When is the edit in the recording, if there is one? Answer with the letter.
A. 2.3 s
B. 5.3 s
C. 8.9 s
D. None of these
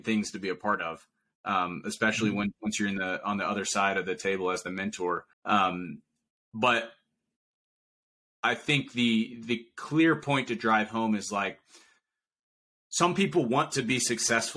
B